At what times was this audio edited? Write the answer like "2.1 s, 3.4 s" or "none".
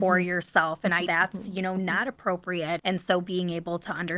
1.1 s, 2.8 s